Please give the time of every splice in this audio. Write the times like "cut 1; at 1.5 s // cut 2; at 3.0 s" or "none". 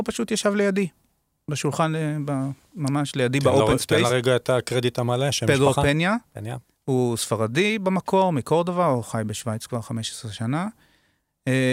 none